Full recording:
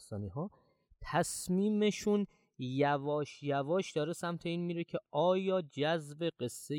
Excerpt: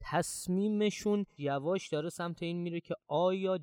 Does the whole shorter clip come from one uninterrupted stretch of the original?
no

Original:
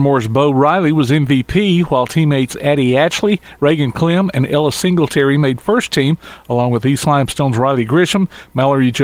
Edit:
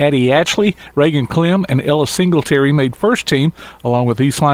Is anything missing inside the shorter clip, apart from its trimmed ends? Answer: no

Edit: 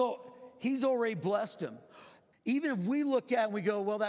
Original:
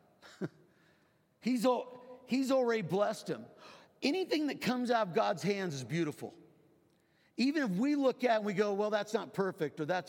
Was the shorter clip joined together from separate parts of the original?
yes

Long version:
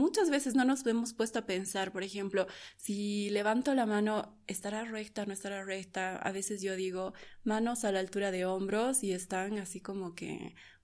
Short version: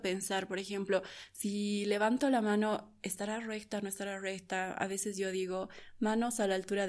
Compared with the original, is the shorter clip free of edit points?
yes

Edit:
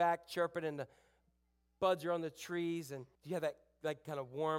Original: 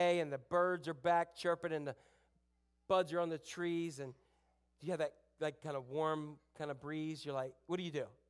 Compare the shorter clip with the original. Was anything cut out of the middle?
yes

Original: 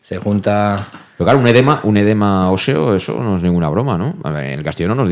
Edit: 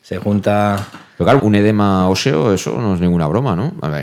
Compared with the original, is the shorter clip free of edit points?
no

